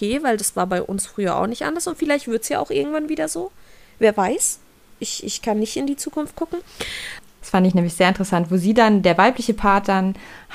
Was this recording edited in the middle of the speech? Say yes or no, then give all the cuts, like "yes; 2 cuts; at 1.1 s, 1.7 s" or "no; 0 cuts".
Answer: yes; 1 cut; at 7.4 s